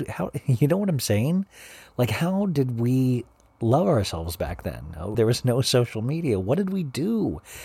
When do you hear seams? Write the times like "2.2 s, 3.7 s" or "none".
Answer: 5.1 s